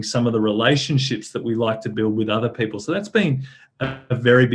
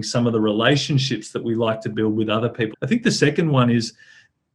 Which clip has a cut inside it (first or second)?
second